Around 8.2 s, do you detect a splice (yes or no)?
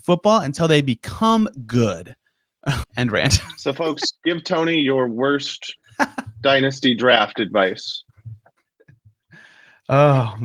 no